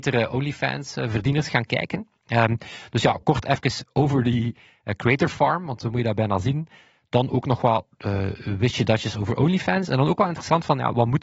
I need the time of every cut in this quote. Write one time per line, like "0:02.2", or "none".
none